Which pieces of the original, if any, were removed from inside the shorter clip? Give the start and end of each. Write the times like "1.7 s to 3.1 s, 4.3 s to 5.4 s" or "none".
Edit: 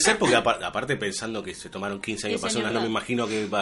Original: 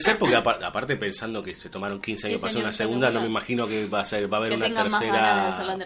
2.7 s to 3.1 s